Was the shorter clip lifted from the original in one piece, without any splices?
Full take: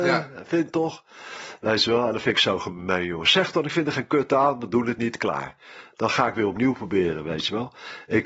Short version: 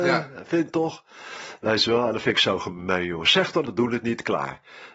no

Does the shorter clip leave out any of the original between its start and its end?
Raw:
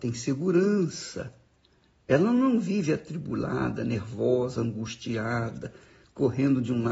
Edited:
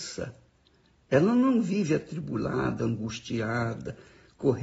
yes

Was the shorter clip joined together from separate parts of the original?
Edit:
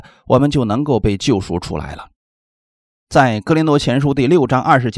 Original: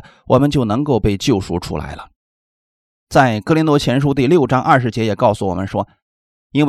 no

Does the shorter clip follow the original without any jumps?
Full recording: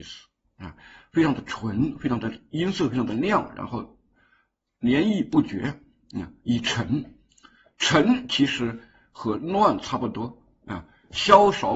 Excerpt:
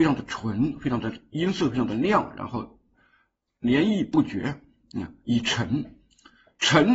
yes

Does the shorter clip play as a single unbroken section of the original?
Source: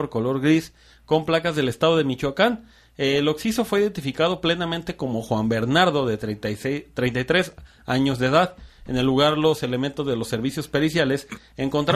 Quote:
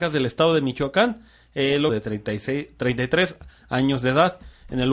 no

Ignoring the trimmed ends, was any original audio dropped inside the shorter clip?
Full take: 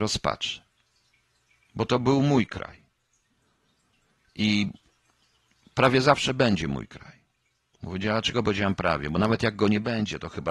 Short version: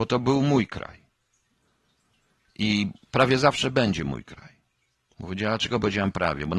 yes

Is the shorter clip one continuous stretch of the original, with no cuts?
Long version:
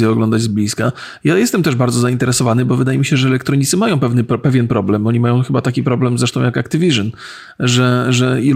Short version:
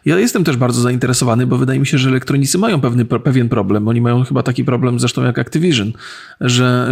yes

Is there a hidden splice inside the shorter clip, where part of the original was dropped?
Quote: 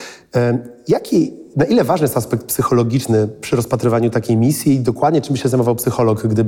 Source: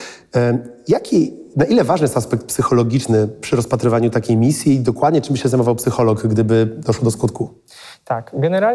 no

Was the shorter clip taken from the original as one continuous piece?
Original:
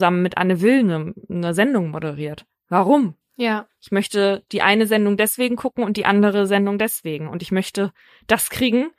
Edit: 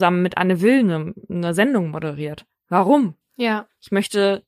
yes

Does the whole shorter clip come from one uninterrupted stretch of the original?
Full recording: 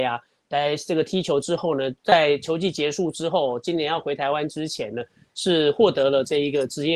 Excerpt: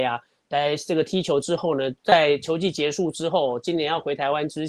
yes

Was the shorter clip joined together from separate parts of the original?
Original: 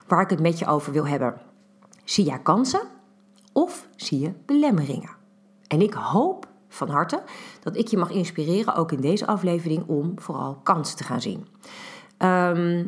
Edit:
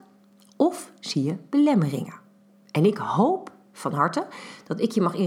no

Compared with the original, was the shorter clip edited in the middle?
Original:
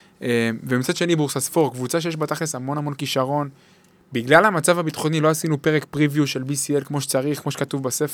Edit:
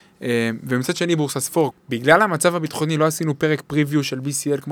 yes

